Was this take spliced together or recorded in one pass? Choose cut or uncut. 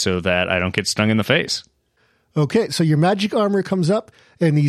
uncut